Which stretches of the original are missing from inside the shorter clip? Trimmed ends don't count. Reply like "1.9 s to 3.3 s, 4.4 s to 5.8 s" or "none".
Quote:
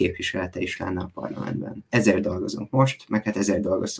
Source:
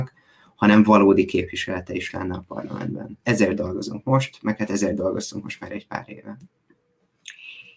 none